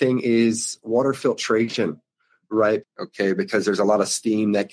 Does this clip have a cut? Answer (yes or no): yes